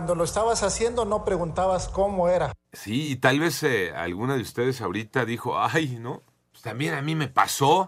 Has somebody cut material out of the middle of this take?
no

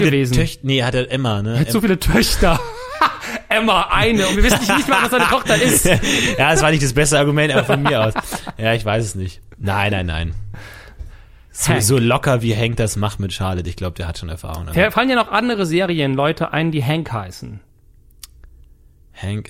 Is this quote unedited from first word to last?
yes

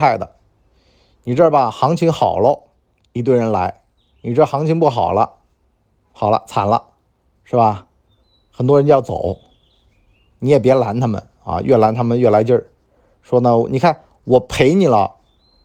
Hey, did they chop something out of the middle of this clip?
no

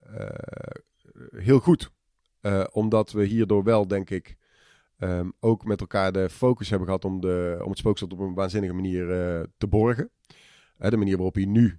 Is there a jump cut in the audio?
no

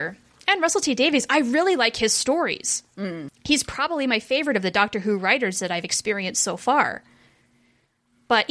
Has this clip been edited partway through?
yes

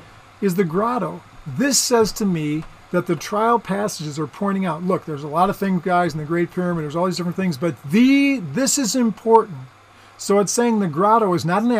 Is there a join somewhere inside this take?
no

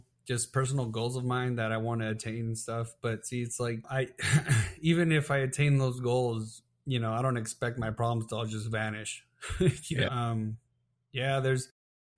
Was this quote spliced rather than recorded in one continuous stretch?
yes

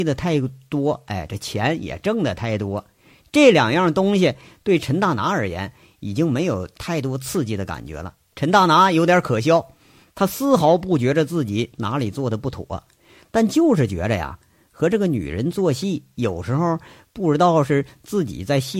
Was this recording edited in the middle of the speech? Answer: yes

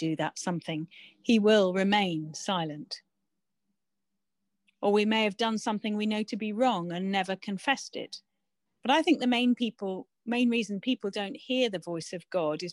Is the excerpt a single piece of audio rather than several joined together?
no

